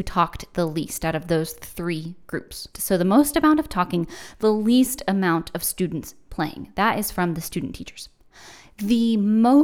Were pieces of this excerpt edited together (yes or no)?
yes